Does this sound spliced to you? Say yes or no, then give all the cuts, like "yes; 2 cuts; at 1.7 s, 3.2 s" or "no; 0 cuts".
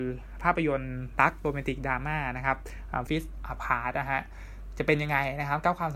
yes; 1 cut; at 3.1 s